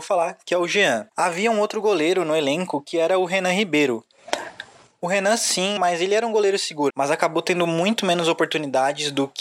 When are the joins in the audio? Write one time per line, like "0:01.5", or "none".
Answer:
0:01.1
0:05.8
0:06.9